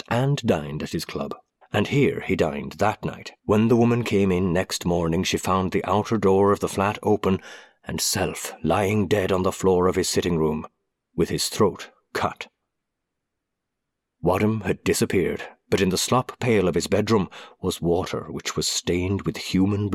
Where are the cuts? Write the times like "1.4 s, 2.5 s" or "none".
1.6 s, 3.4 s